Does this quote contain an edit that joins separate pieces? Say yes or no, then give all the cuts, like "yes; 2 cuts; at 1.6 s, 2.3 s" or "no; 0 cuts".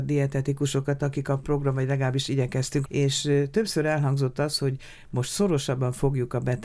yes; 2 cuts; at 1.0 s, 2.8 s